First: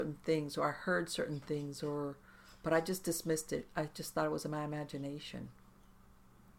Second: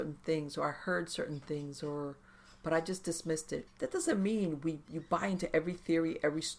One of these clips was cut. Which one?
second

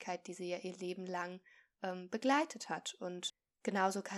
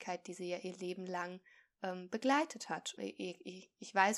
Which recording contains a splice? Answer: second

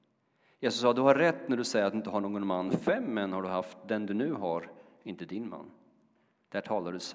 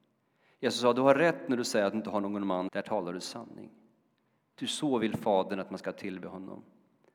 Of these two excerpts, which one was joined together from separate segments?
second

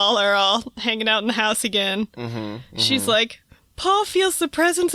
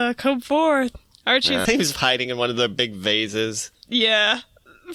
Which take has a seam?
second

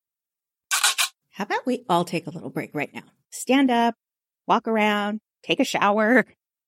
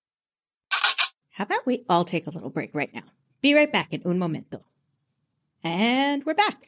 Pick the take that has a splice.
first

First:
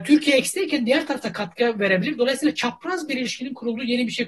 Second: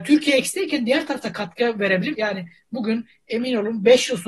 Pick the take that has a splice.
second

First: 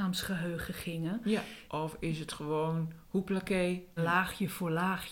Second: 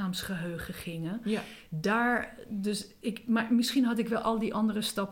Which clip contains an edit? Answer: first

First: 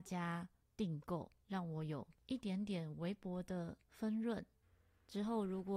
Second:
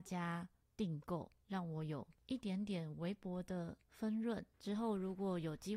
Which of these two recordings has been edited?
second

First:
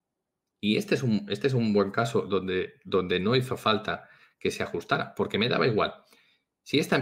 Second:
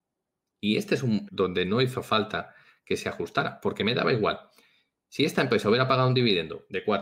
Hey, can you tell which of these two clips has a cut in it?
second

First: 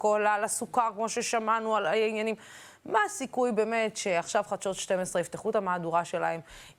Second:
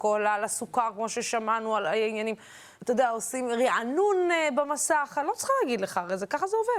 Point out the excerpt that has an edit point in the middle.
second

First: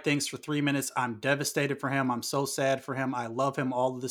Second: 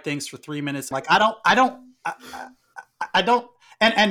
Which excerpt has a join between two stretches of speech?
second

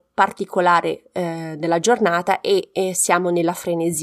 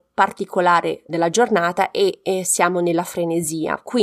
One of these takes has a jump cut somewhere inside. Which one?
second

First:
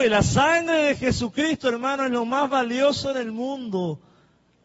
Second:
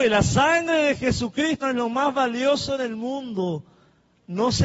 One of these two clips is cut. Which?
second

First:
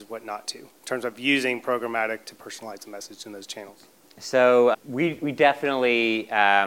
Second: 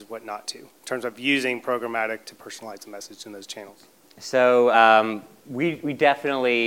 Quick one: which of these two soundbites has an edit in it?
first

